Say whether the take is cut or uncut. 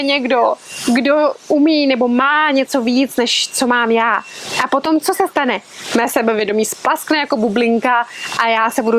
uncut